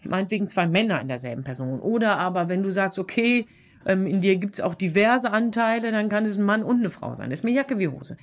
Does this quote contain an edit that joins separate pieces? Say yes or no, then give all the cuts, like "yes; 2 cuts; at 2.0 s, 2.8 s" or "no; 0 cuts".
no; 0 cuts